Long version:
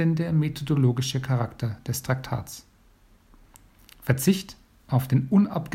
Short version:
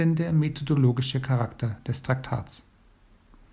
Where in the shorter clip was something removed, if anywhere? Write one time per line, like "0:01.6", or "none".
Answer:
none